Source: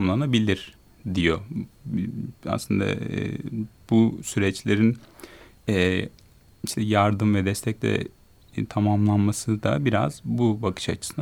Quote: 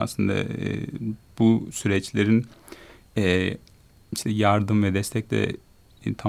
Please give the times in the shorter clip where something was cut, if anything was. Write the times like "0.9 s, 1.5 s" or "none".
none